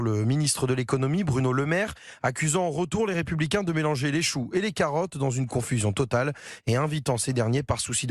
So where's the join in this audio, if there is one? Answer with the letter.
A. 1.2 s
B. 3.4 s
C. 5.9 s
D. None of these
D